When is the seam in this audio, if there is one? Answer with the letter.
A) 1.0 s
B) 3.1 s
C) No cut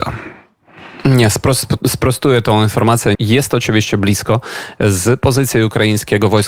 B